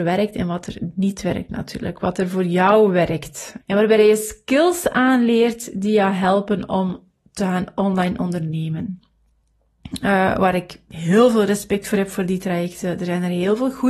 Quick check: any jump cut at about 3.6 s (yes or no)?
yes